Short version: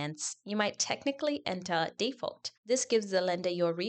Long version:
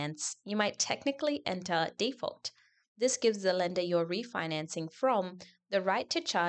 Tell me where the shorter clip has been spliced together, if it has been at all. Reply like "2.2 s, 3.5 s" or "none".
2.6 s